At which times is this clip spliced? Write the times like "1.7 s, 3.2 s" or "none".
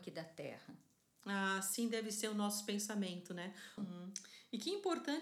3.8 s